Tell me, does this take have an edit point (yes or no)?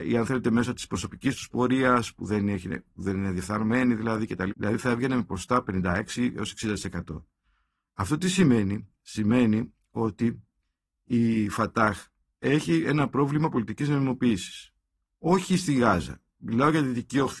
yes